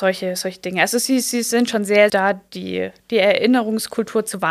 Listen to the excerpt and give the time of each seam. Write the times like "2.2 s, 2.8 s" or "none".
2.1 s